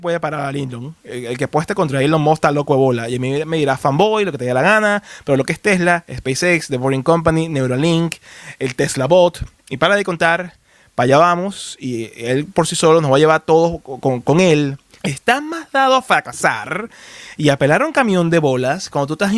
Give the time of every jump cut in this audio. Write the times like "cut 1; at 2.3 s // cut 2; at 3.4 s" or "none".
cut 1; at 15.0 s